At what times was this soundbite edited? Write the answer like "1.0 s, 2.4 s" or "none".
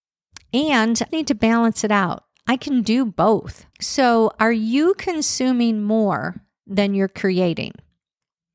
1.1 s, 3.7 s